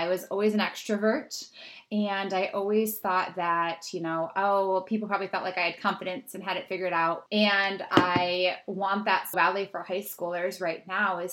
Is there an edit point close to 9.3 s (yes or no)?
yes